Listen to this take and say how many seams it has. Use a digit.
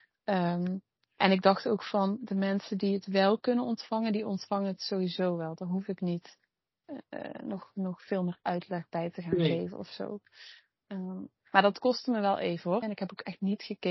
1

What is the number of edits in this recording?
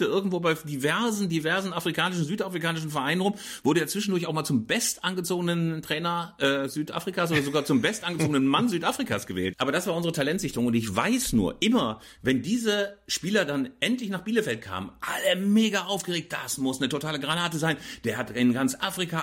1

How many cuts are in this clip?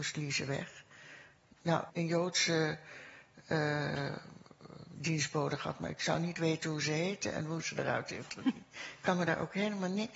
1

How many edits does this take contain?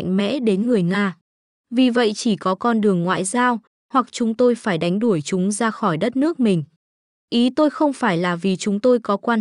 1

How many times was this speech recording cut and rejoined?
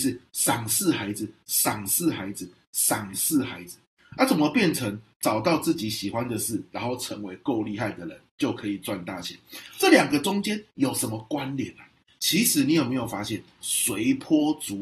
2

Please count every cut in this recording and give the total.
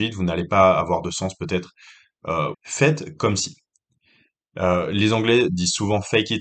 1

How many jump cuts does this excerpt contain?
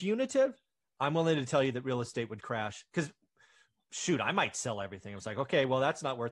0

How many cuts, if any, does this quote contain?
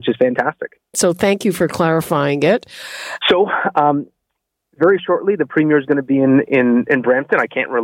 2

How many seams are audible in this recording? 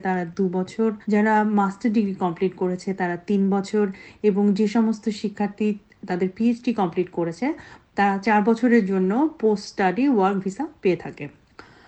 1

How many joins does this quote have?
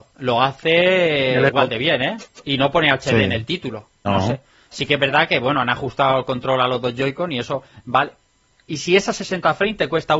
1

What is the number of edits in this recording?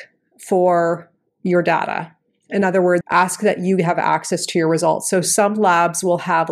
1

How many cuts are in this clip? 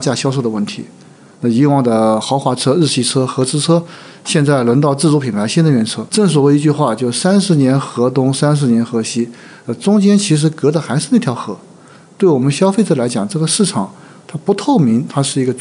1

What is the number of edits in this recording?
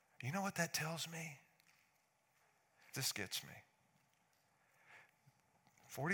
1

